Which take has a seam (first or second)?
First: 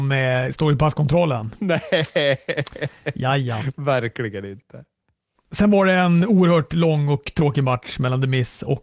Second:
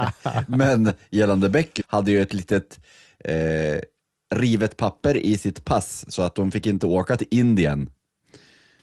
second